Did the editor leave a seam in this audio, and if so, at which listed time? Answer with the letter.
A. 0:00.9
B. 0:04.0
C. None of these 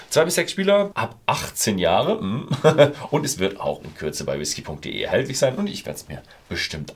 A